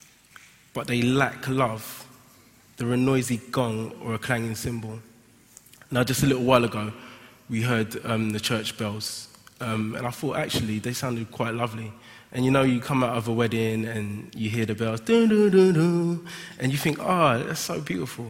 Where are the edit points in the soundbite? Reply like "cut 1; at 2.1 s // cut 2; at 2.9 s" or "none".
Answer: none